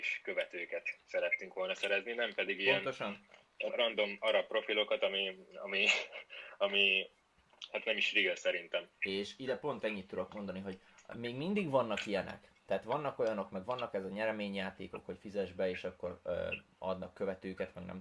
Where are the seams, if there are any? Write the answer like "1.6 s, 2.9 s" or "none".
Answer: 3.7 s, 8.9 s